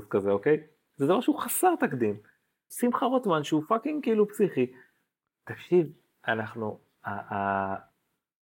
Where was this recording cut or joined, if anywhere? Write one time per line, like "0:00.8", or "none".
0:02.7